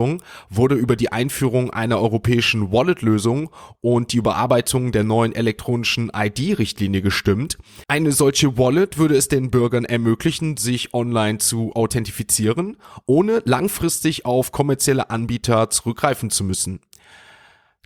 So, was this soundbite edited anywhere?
yes; 1 cut; at 7.8 s

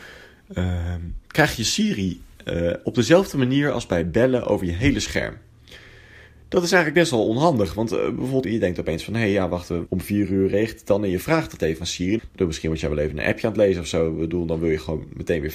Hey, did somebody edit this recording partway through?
yes; 3 cuts; at 8.4 s, 9.9 s, 12.2 s

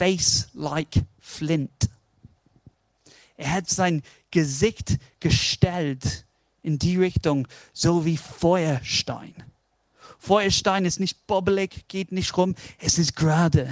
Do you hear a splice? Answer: no; 0 cuts

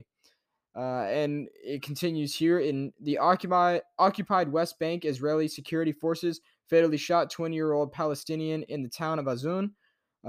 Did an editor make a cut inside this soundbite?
no; 0 cuts

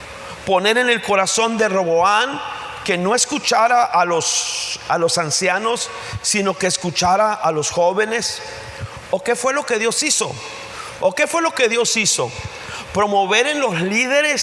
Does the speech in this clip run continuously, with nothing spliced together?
no; 1 cut; at 11.0 s

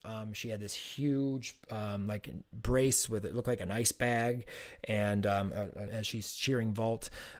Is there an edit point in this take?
yes; 2 cuts; at 1.6 s, 5.9 s

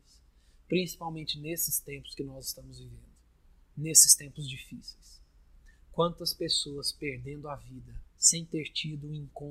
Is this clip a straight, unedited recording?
no; 1 cut; at 8.1 s

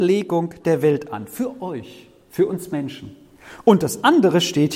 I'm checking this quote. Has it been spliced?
no; 0 cuts

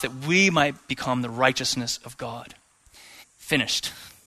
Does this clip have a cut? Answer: yes; 1 cut; at 3.2 s

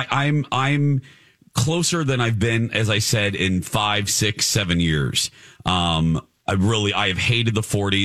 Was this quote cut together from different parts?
no; 0 cuts

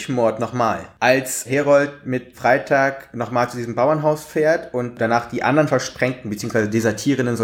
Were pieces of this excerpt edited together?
no; 0 cuts

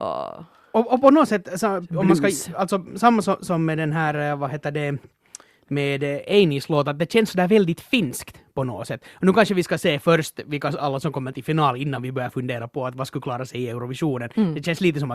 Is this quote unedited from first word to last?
yes; 0 cuts

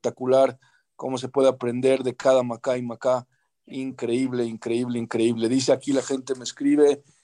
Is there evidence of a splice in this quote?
no; 0 cuts

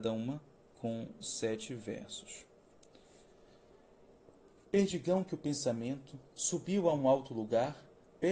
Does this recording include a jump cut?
no; 0 cuts

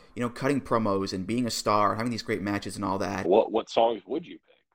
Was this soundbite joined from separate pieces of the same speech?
yes; 1 cut; at 3.2 s

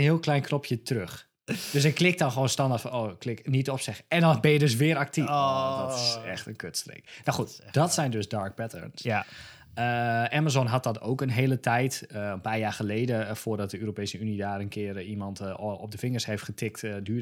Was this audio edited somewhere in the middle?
no; 0 cuts

